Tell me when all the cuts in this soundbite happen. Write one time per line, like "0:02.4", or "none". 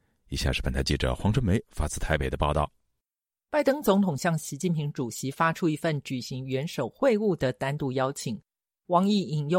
0:03.4